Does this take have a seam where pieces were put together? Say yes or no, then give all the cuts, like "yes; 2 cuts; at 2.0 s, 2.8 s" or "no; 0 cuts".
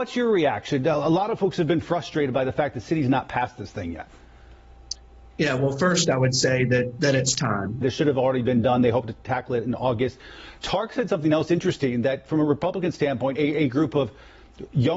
yes; 2 cuts; at 7.8 s, 13.4 s